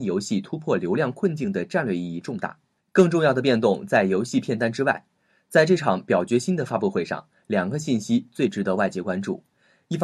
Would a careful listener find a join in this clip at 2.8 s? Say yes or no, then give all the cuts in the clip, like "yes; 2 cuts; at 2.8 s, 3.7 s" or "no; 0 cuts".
yes; 1 cut; at 2.8 s